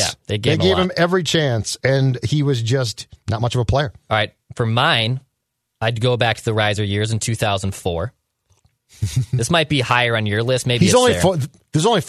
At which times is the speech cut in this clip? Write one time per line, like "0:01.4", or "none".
none